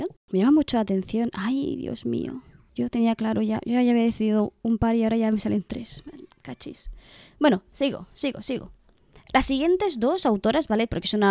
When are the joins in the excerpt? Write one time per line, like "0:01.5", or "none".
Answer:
none